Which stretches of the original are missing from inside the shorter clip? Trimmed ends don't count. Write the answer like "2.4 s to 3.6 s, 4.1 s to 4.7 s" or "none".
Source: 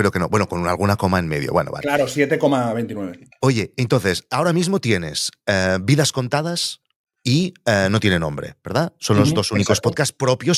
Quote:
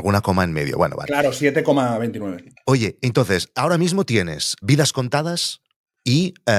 5.4 s to 5.8 s